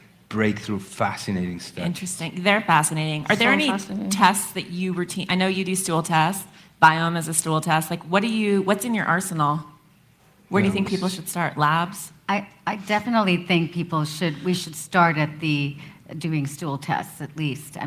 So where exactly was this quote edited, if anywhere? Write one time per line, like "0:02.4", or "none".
none